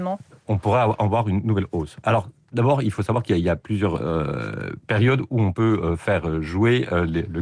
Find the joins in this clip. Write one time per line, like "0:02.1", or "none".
none